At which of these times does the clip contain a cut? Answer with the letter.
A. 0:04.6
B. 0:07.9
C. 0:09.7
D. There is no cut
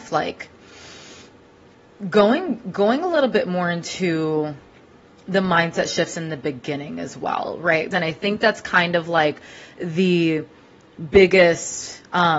B